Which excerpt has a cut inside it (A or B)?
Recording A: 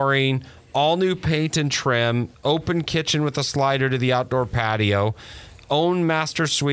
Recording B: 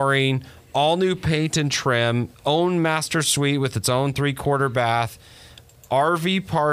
B